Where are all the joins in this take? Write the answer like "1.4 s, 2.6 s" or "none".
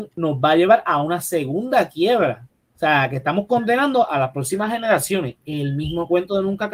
2.7 s